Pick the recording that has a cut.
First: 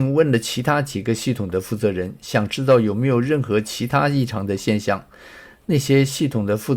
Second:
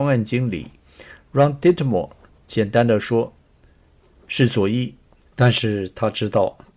second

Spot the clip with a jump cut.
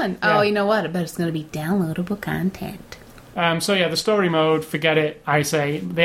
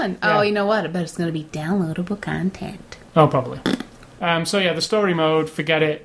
first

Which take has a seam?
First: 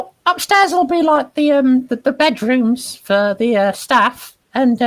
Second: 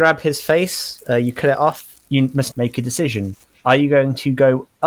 second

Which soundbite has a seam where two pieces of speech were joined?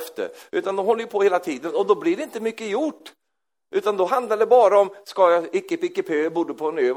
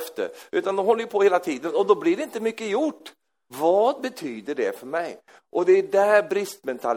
second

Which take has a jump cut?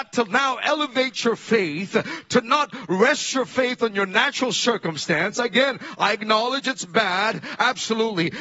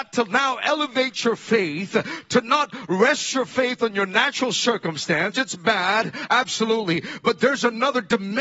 second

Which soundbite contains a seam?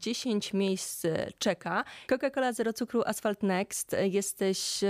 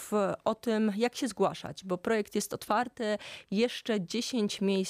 first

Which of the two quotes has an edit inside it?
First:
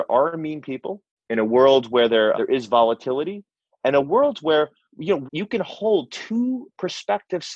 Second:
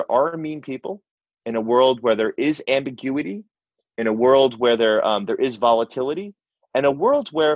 first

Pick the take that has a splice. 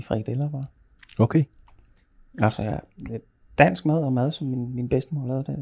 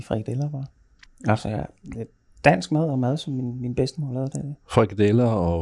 second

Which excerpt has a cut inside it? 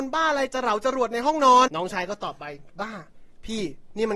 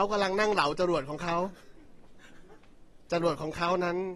first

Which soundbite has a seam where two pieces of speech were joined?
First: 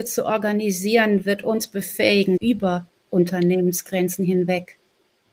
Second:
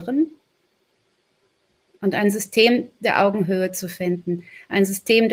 first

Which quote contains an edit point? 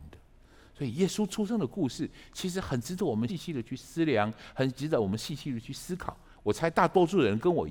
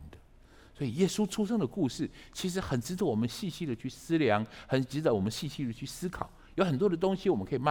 first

